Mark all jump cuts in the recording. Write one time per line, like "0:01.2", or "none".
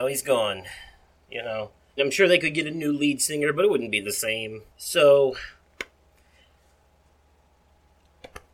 0:02.0
0:04.7